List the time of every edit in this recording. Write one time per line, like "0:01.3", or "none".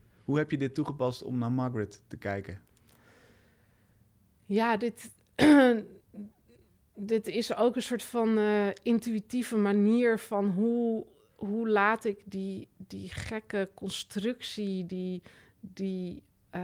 none